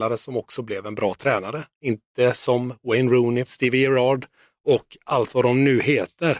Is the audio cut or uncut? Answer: cut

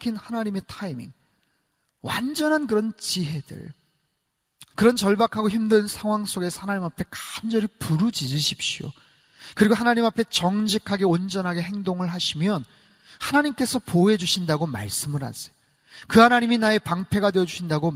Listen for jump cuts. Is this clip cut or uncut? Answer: cut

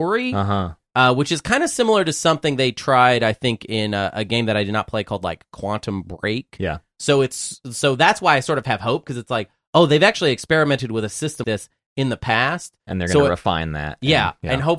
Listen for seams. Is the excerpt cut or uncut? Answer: cut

